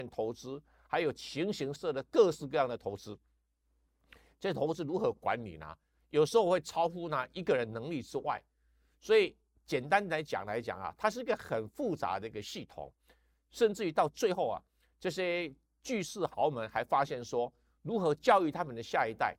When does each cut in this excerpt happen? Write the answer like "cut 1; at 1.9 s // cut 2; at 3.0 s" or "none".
cut 1; at 1.8 s